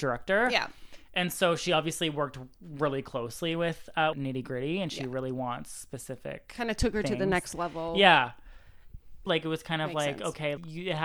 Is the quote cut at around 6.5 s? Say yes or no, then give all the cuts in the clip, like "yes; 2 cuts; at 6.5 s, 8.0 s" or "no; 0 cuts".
no; 2 cuts; at 4.1 s, 9.3 s